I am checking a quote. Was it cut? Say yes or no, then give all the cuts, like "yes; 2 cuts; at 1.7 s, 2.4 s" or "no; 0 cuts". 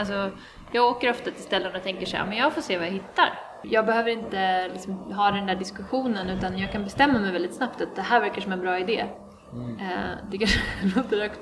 yes; 1 cut; at 3.6 s